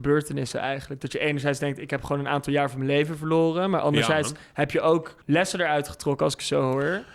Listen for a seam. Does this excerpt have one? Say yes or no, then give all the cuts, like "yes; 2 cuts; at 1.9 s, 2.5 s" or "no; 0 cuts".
yes; 1 cut; at 5.2 s